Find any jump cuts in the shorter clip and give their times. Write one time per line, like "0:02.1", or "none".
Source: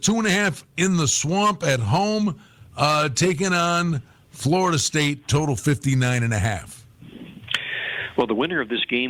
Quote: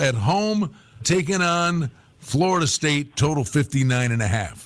0:01.0